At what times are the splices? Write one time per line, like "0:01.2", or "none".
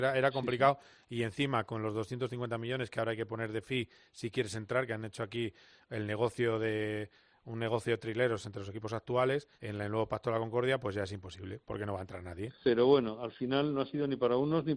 0:09.5
0:12.6